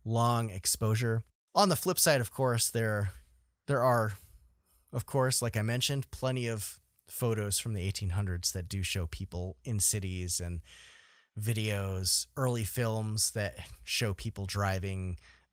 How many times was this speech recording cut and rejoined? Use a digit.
1